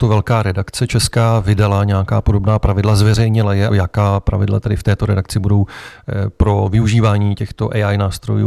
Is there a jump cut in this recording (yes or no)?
yes